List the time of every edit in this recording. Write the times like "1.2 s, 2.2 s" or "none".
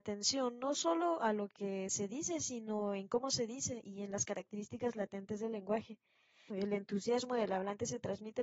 6.5 s